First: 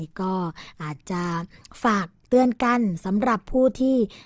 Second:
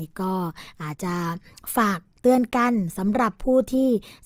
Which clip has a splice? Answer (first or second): second